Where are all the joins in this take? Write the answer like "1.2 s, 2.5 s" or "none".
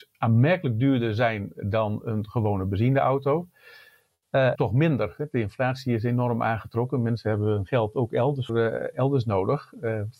4.5 s, 8.5 s